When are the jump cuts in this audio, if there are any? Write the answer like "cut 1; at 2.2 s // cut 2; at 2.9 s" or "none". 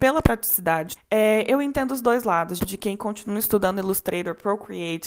cut 1; at 1.0 s // cut 2; at 2.6 s